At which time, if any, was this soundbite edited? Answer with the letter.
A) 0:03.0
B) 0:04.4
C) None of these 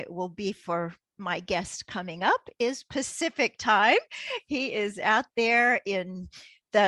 C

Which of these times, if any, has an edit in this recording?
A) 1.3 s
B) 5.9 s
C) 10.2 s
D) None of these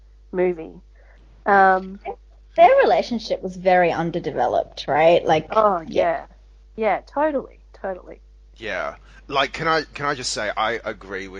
D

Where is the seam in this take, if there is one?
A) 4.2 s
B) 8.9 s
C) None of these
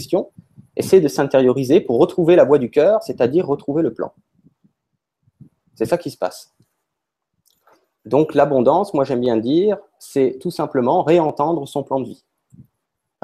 C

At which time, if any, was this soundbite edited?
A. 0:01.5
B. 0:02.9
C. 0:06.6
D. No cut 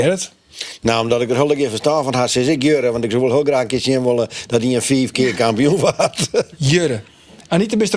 D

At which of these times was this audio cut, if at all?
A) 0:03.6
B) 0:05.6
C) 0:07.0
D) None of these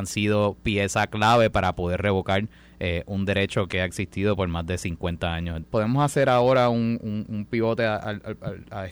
B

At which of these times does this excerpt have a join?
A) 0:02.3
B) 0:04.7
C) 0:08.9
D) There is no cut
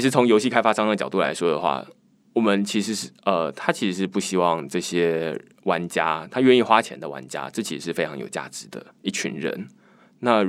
C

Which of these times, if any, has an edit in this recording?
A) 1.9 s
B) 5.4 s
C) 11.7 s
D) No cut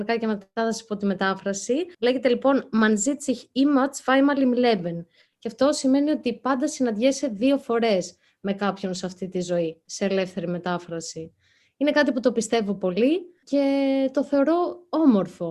A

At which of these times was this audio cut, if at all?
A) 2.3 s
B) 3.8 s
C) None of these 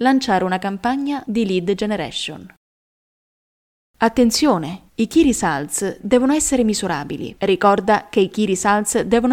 B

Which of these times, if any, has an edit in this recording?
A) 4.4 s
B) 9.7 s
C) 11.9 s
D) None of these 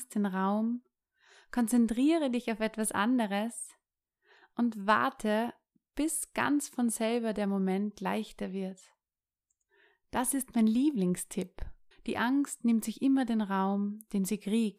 C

